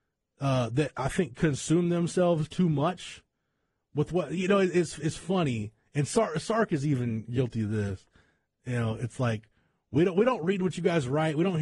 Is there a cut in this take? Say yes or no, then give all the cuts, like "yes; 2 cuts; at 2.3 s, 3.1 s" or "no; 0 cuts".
no; 0 cuts